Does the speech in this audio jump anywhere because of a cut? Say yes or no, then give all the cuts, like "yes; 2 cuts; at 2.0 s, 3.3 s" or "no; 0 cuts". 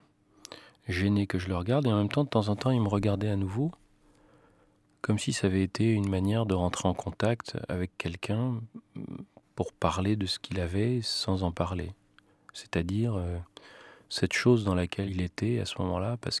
yes; 1 cut; at 15.1 s